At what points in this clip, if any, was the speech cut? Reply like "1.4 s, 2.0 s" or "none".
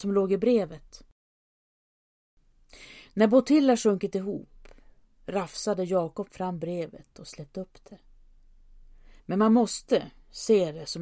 9.2 s